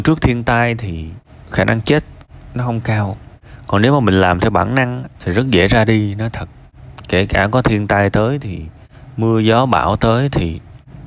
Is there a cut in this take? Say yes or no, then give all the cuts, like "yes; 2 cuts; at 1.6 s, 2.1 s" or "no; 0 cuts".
yes; 1 cut; at 5.1 s